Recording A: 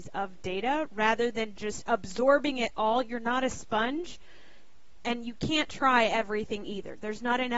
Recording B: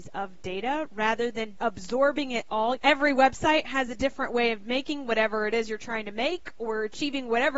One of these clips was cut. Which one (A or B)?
B